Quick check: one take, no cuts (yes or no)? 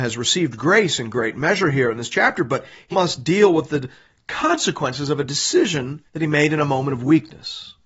no